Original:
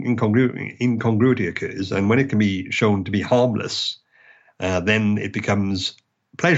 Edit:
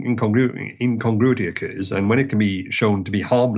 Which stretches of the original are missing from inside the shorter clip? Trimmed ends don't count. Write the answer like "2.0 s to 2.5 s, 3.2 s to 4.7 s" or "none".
none